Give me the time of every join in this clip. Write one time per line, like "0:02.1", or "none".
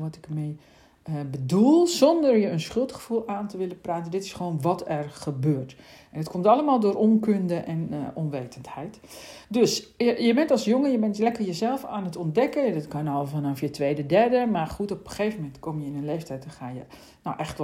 none